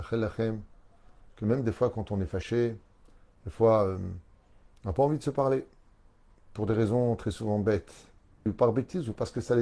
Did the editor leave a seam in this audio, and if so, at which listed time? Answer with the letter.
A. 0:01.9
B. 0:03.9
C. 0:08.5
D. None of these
C